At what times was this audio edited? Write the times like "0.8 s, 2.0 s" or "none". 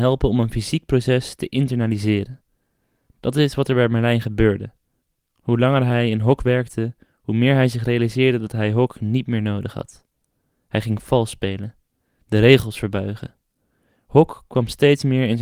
none